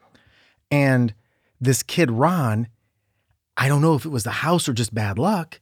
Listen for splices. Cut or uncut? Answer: uncut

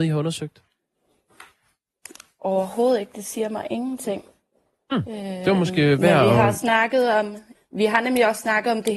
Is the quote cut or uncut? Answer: cut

